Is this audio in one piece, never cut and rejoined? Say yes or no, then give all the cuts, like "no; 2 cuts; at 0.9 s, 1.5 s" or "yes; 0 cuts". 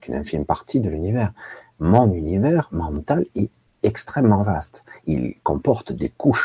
yes; 0 cuts